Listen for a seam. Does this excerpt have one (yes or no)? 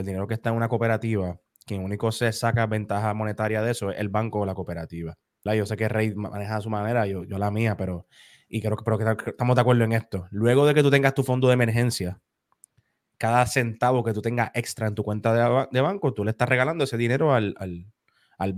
yes